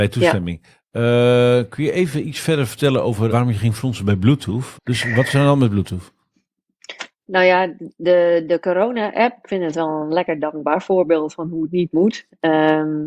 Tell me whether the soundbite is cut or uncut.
cut